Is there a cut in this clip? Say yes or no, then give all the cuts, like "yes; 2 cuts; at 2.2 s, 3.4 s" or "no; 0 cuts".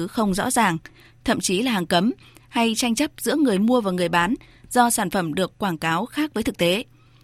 yes; 1 cut; at 1.1 s